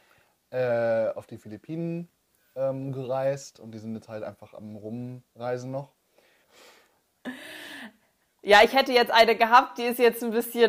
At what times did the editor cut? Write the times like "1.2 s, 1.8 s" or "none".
6.4 s

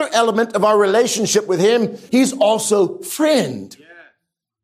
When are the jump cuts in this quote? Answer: 2.1 s

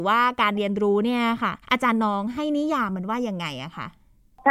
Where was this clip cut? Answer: 1.6 s

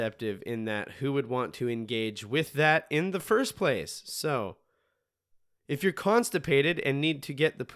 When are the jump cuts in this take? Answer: none

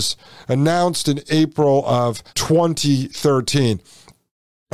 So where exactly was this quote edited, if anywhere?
2.3 s

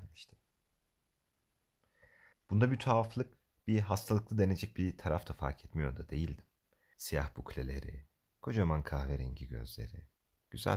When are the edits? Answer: 2.3 s, 6.9 s

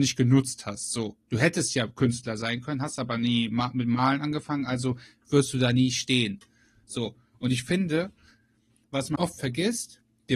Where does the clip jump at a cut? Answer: 9.2 s

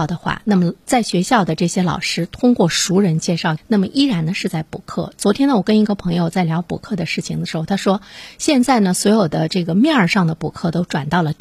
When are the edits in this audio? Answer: 3.6 s

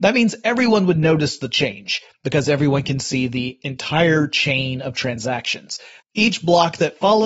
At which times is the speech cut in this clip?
6.0 s

